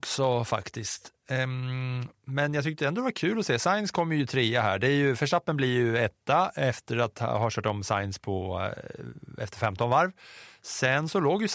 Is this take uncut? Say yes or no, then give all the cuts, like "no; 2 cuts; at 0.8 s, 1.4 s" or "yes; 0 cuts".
yes; 0 cuts